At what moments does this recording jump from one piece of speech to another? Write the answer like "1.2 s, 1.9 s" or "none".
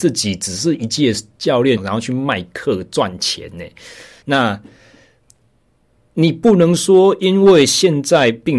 1.8 s, 4.2 s